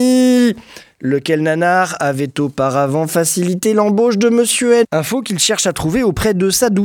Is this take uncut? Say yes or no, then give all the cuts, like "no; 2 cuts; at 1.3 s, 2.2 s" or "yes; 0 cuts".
no; 1 cut; at 4.8 s